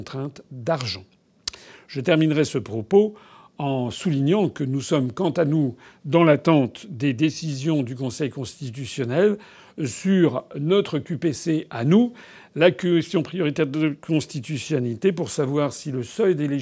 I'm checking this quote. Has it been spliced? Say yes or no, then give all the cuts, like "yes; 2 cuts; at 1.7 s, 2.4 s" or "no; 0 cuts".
no; 0 cuts